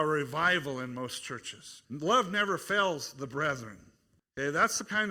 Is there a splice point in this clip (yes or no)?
yes